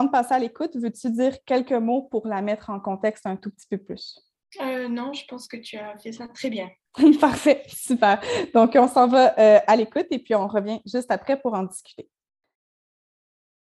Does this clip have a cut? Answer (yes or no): no